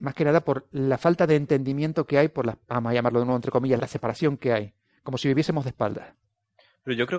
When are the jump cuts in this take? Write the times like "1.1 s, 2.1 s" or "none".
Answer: 2.6 s, 3.8 s